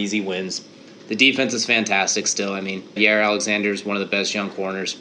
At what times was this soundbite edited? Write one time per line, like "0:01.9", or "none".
0:03.0